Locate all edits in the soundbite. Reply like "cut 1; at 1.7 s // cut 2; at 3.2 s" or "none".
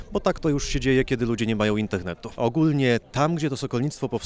cut 1; at 2.4 s